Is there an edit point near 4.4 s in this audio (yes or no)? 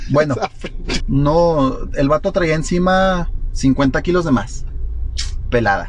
no